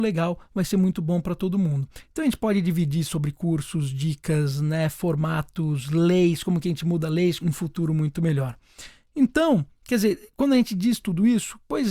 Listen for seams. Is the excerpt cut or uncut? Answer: cut